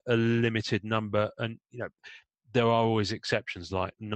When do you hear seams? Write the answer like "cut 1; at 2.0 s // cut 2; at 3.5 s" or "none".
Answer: none

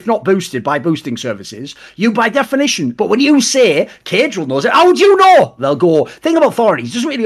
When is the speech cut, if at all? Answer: cut 1; at 2.9 s // cut 2; at 5.6 s

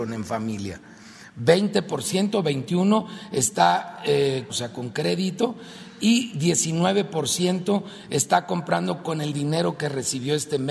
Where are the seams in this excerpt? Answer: cut 1; at 4.5 s

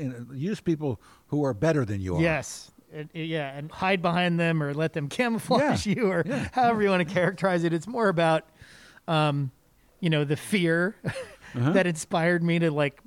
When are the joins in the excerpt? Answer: cut 1; at 3.7 s

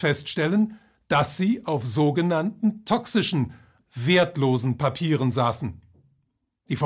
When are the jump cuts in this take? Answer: cut 1; at 3.8 s

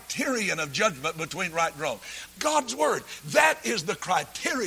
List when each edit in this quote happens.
cut 1; at 2.3 s

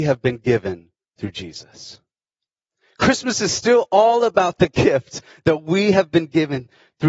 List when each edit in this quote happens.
none

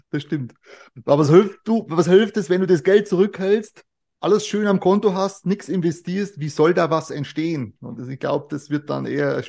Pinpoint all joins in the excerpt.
none

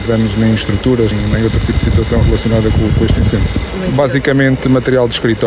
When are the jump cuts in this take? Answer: cut 1; at 1.1 s // cut 2; at 3.7 s

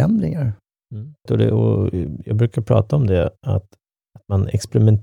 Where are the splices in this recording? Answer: cut 1; at 1.3 s // cut 2; at 3.4 s

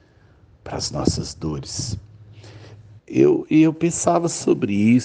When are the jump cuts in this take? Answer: cut 1; at 3.0 s

